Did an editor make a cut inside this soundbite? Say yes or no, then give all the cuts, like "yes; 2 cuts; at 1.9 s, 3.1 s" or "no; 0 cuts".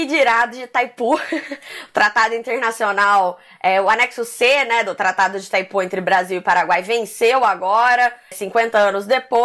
yes; 1 cut; at 8.3 s